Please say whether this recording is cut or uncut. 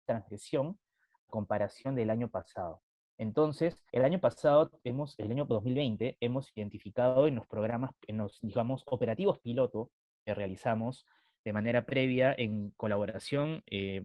cut